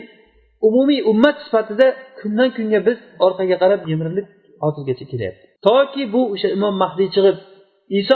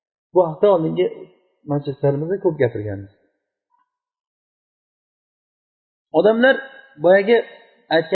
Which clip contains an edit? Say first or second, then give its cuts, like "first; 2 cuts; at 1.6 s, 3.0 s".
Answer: first; 2 cuts; at 3.8 s, 5.6 s